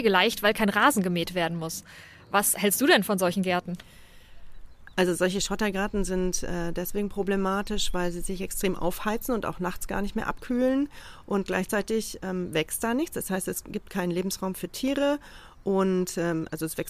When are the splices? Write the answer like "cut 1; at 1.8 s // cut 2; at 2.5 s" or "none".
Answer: none

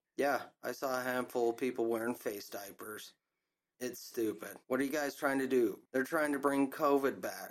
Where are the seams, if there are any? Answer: cut 1; at 4.6 s // cut 2; at 5.8 s

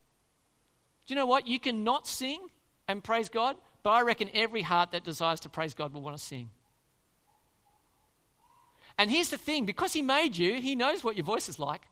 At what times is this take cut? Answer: none

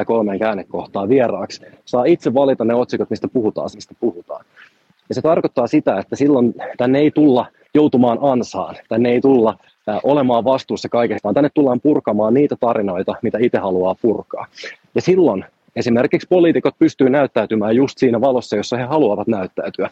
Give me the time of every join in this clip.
cut 1; at 3.7 s // cut 2; at 7.6 s // cut 3; at 11.2 s

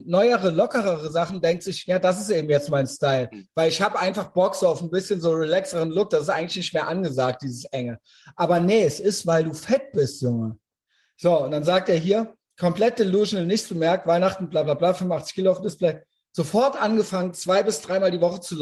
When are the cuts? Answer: none

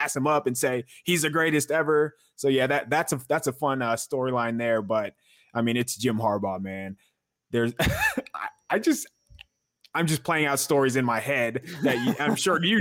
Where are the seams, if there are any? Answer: none

